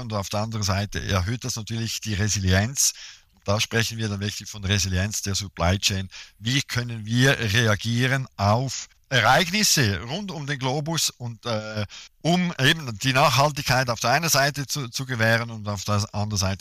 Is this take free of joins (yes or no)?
yes